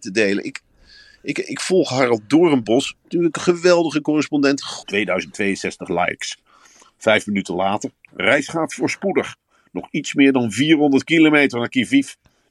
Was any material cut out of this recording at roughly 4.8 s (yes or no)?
yes